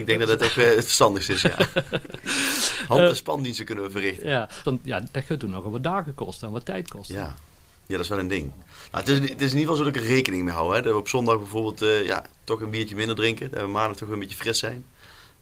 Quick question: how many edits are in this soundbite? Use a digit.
1